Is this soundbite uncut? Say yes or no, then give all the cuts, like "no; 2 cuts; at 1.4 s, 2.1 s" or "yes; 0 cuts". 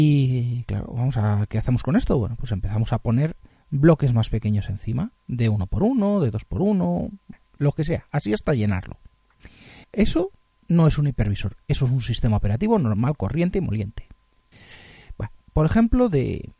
no; 2 cuts; at 9.8 s, 15.4 s